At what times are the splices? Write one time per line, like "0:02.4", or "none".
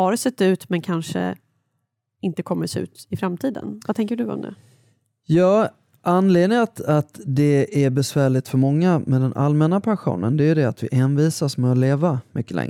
none

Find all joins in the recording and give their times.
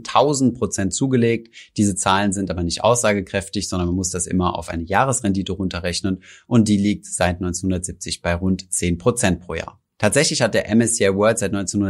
0:09.9

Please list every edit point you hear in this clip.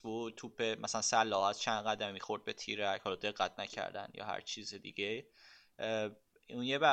none

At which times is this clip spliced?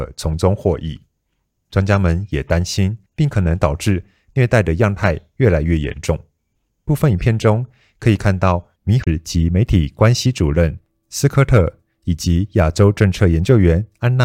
0:03.1

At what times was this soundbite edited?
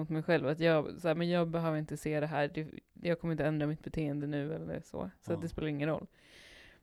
none

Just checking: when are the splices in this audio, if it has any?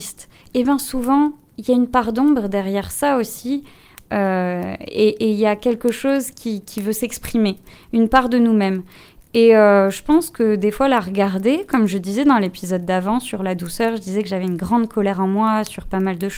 none

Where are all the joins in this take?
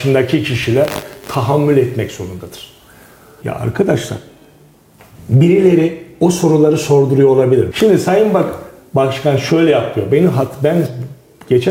0:03.4
0:07.7

